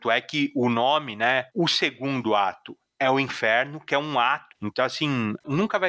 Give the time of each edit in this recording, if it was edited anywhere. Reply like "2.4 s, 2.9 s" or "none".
1.5 s, 4.5 s